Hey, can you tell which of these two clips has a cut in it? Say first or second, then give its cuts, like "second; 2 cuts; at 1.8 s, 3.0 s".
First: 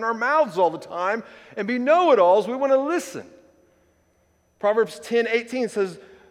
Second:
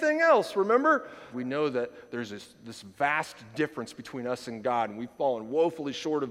second; 1 cut; at 1.3 s